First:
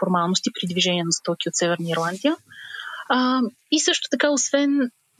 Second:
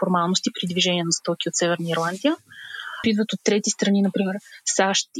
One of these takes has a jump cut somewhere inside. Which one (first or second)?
second